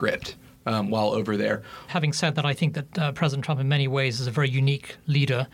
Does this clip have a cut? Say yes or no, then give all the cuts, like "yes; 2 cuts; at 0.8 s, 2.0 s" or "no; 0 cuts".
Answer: yes; 1 cut; at 1.9 s